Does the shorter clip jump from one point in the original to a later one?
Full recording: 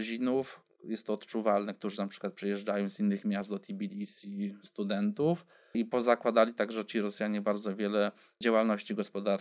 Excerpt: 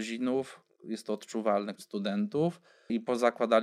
yes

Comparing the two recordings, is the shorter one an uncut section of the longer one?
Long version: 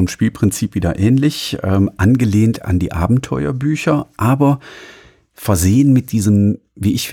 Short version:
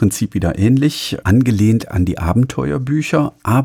no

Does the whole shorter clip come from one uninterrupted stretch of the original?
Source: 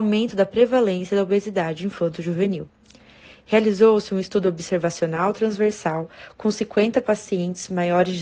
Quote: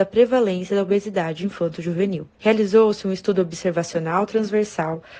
no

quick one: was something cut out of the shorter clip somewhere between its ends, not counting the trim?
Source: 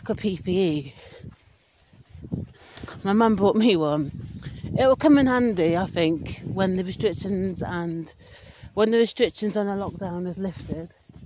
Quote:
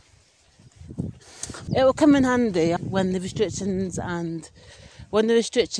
yes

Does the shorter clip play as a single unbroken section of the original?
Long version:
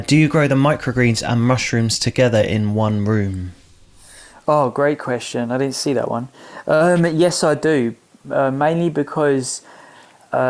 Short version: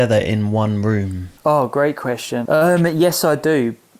no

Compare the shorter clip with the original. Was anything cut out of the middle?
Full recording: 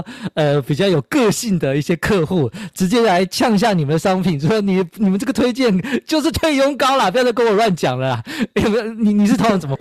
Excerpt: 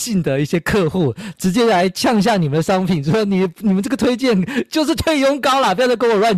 no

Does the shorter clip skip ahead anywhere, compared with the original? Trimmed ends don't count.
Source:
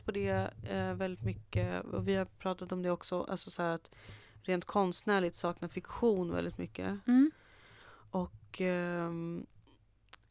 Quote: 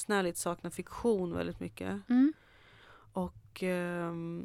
no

